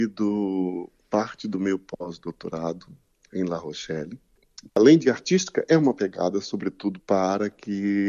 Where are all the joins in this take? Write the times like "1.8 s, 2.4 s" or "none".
4.7 s, 7.0 s